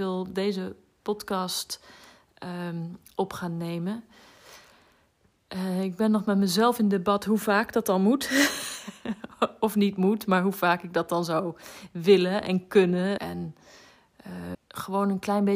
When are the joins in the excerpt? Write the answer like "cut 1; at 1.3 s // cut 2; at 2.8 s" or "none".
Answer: cut 1; at 13.2 s // cut 2; at 14.5 s